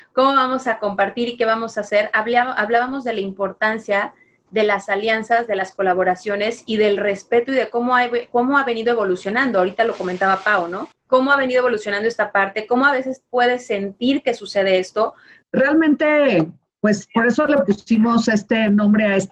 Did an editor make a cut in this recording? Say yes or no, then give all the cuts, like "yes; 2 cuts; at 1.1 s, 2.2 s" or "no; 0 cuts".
no; 0 cuts